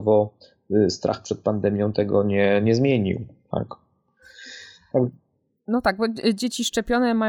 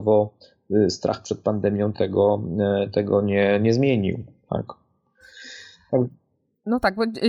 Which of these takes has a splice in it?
first; 1 cut; at 1.9 s

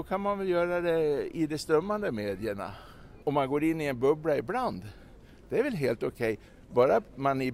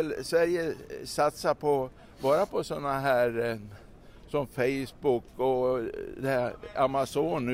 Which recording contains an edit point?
first; 1 cut; at 3.2 s

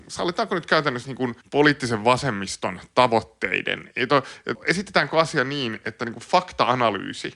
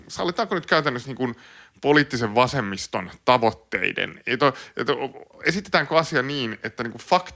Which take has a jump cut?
first; 2 cuts; at 1.4 s, 4.5 s

